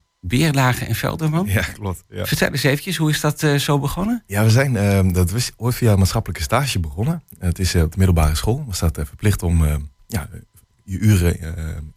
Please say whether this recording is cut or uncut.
uncut